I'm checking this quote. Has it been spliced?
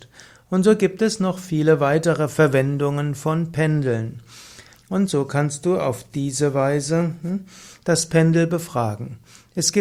yes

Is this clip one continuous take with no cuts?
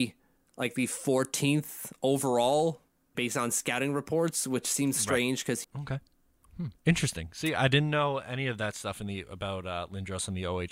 no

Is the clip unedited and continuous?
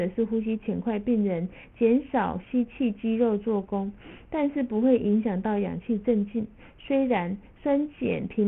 yes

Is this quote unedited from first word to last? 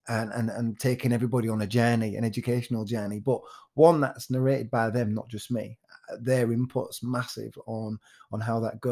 yes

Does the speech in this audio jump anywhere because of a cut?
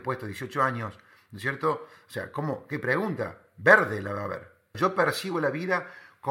yes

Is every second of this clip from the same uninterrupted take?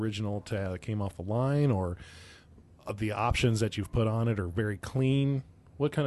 yes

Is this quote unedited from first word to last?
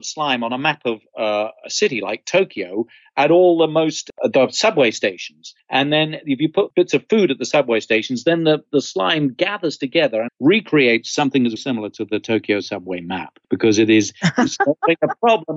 no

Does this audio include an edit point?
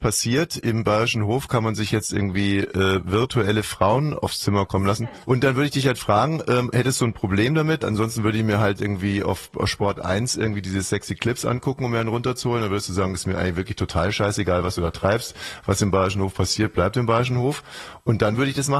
yes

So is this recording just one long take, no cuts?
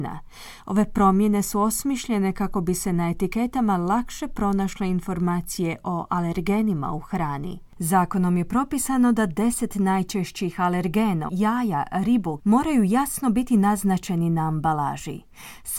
no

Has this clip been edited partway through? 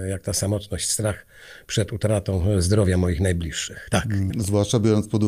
yes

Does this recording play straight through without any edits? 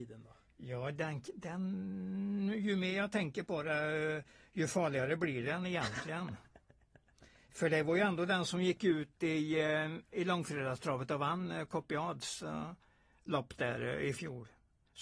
yes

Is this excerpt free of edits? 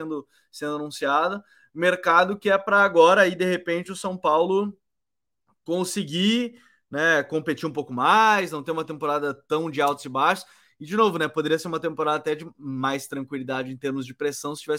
yes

